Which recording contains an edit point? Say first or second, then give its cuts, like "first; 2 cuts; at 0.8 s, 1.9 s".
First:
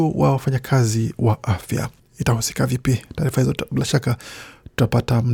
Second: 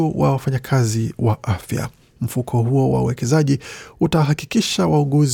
first; 1 cut; at 2.0 s